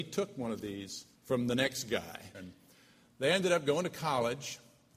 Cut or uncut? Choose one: cut